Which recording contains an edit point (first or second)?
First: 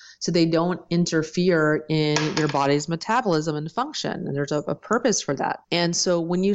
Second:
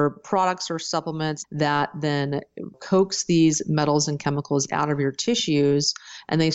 second